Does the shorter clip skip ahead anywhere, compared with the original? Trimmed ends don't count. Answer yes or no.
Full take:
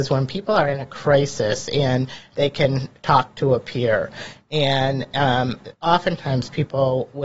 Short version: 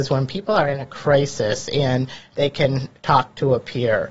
no